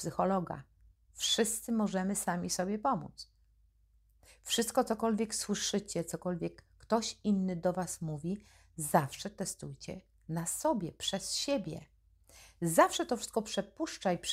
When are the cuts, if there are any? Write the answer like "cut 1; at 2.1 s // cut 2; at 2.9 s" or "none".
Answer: cut 1; at 1.1 s